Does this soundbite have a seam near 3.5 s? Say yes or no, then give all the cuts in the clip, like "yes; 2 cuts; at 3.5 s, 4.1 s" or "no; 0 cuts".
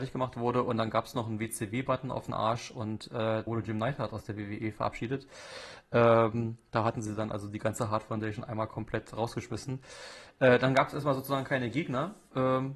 yes; 1 cut; at 3.5 s